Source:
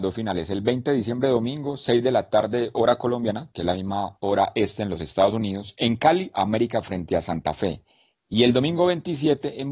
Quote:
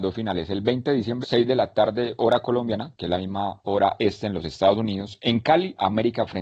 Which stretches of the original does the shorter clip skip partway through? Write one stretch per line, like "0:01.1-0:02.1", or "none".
0:01.2-0:01.8